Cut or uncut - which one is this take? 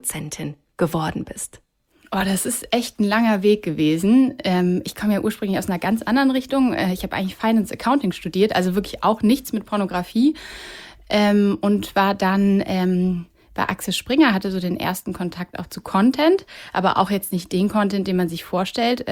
uncut